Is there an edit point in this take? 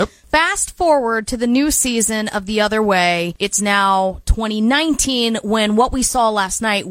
no; 0 cuts

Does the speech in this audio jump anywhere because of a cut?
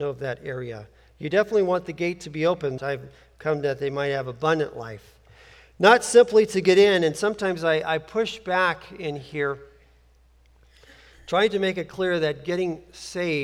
yes; 1 cut; at 2.8 s

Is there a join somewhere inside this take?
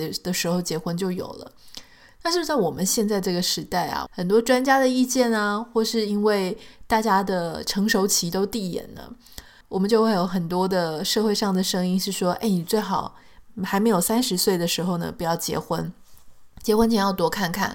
yes; 2 cuts; at 4.1 s, 9.6 s

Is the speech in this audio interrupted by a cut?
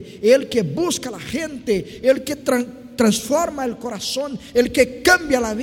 no; 0 cuts

